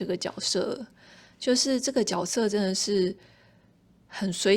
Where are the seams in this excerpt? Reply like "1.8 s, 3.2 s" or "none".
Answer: none